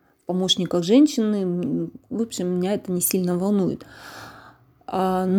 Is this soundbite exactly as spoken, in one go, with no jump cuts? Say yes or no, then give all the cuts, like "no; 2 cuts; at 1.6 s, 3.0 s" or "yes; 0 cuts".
yes; 0 cuts